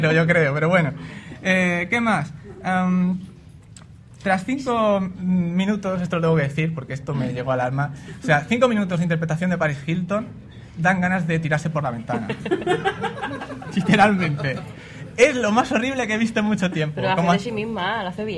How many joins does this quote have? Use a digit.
0